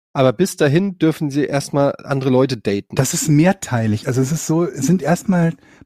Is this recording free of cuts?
yes; 0 cuts

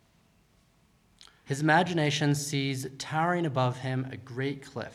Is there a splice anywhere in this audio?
yes; 1 cut; at 1.5 s

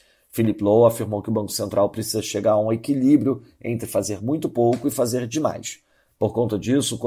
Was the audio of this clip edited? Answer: no; 0 cuts

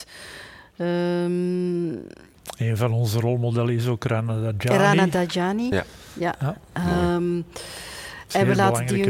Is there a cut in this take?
no; 0 cuts

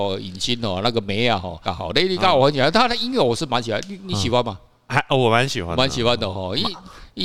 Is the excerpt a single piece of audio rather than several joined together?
no; 1 cut; at 1.6 s

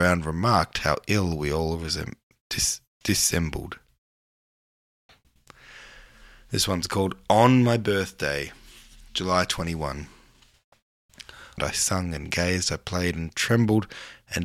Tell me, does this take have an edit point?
yes; 1 cut; at 11.6 s

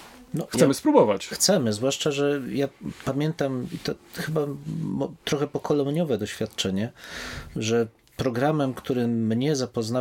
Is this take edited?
no; 0 cuts

